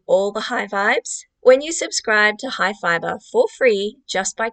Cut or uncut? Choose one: cut